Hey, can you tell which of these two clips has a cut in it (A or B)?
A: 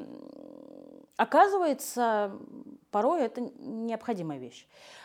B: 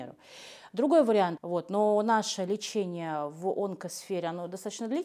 B